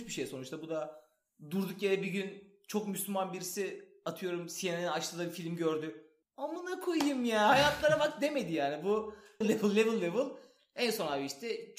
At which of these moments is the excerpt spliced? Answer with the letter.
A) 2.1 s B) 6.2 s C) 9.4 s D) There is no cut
C